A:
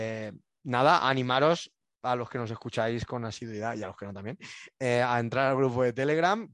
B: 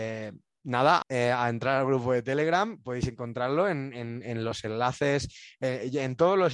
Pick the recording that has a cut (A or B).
B